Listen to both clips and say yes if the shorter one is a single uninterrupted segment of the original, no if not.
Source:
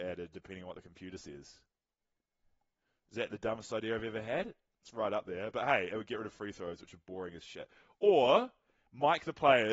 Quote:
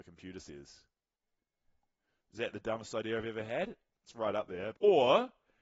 no